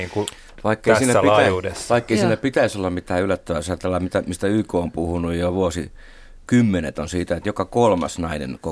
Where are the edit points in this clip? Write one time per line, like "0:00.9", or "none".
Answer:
none